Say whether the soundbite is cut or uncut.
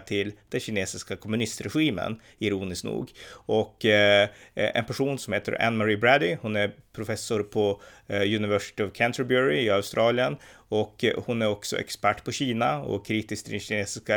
uncut